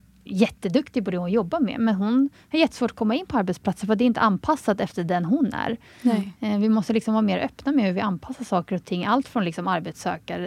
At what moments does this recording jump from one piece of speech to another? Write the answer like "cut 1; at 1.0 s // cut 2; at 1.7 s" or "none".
none